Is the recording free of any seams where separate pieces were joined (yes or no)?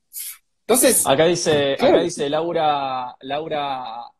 yes